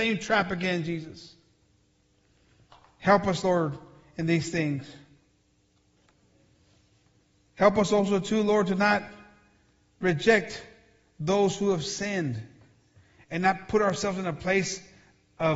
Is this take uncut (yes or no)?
yes